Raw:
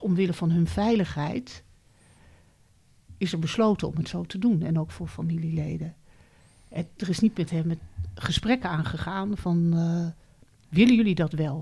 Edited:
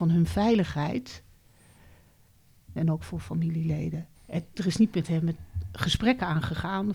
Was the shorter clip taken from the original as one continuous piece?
no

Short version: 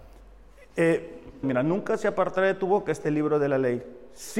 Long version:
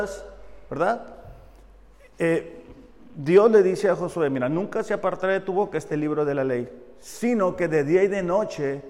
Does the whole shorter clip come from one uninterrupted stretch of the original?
no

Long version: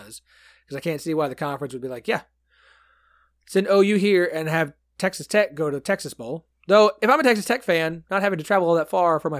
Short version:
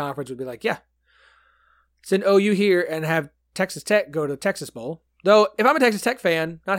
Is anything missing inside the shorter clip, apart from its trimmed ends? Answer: no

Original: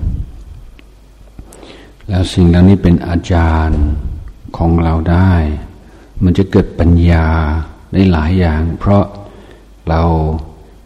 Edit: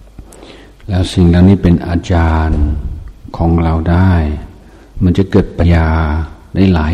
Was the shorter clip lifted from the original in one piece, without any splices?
no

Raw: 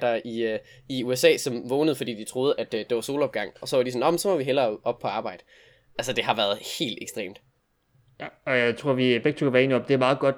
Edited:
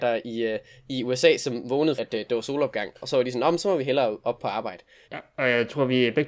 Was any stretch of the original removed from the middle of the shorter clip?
yes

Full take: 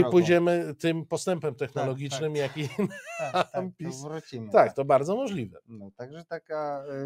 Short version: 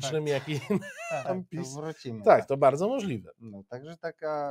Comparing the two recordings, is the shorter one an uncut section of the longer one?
no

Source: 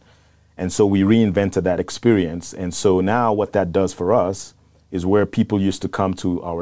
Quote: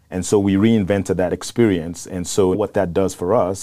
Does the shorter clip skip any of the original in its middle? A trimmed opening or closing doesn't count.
yes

